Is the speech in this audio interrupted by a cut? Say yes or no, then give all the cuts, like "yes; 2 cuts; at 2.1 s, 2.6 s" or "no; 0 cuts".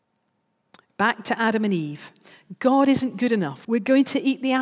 yes; 1 cut; at 3.6 s